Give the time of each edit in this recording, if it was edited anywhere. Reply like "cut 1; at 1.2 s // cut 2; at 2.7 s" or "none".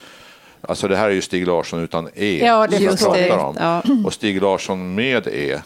none